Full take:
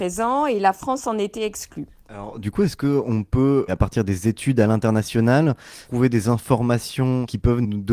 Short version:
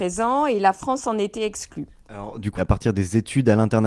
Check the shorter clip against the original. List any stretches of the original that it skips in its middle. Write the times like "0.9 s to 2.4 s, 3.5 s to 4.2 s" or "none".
2.6 s to 3.7 s